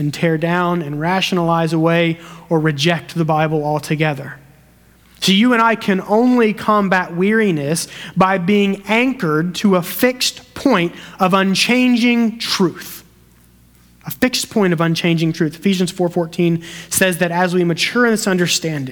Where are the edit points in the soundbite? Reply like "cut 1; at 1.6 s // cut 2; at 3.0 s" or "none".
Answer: none